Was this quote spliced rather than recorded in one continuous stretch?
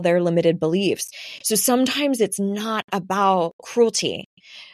no; 0 cuts

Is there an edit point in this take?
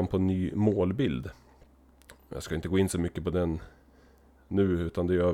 no; 0 cuts

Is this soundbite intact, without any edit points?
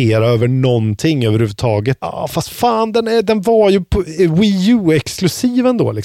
no; 1 cut; at 2.0 s

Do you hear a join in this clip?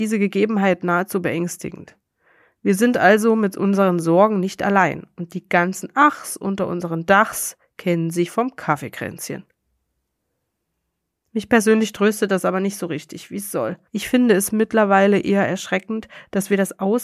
yes; 1 cut; at 13.9 s

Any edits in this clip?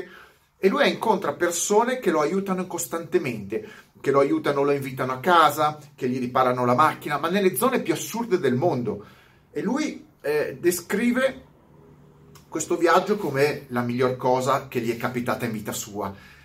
yes; 1 cut; at 9.5 s

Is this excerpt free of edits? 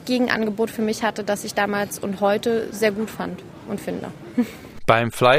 yes; 0 cuts

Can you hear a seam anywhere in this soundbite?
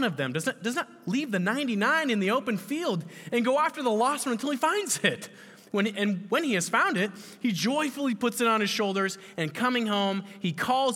no; 0 cuts

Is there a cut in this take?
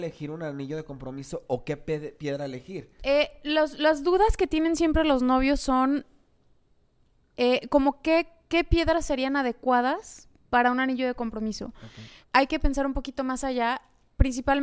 yes; 2 cuts; at 3.0 s, 12.2 s

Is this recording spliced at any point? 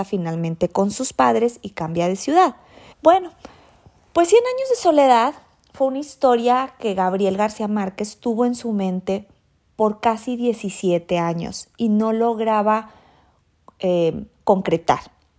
yes; 1 cut; at 2.9 s

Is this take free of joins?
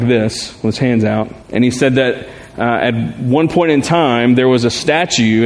no; 1 cut; at 1.4 s

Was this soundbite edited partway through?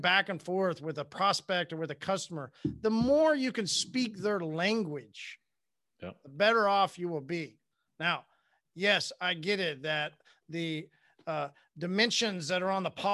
no; 0 cuts

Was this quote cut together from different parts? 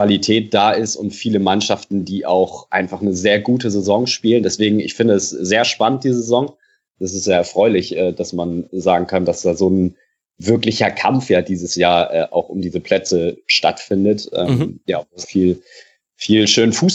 yes; 1 cut; at 15.2 s

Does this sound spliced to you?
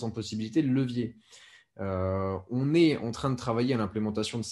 no; 0 cuts

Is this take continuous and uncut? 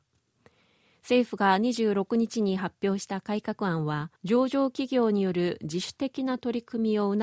no; 1 cut; at 4.2 s

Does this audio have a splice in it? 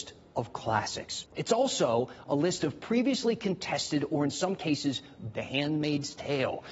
yes; 2 cuts; at 1.2 s, 5.3 s

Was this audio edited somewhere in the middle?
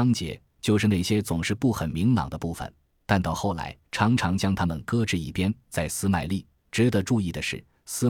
yes; 1 cut; at 3.8 s

